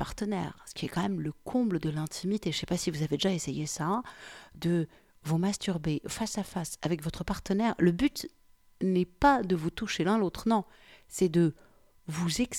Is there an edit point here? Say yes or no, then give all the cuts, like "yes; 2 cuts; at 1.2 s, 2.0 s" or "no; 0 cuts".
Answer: no; 0 cuts